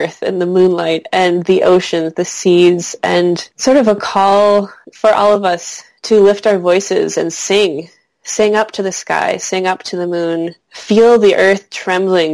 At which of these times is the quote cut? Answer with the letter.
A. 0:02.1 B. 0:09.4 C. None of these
C